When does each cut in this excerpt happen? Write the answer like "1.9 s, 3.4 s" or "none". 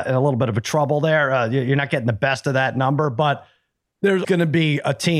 4.2 s

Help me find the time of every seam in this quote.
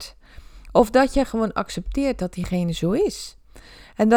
none

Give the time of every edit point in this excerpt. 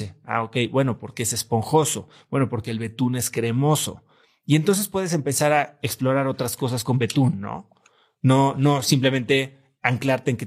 none

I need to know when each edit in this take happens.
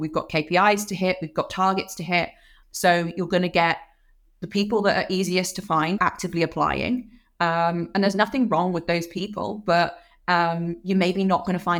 2.6 s, 6.0 s

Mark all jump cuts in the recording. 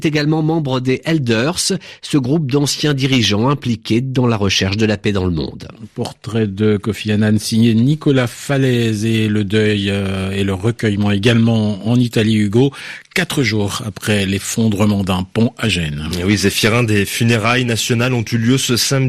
none

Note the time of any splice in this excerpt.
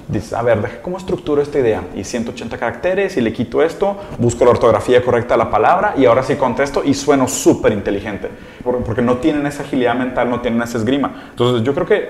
8.6 s

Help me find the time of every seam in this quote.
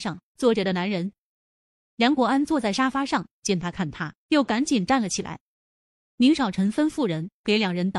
none

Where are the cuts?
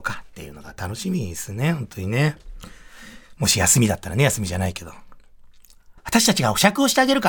6.0 s

